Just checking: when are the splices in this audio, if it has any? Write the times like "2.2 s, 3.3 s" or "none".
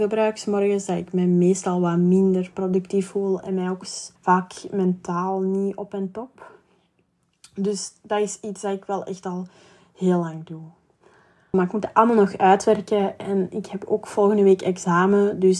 4.2 s, 11.5 s